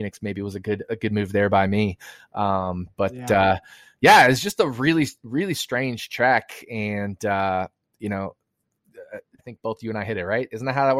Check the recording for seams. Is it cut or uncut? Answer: cut